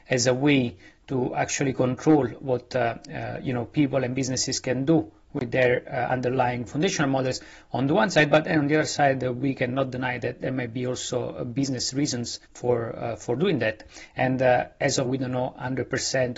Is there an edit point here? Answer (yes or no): yes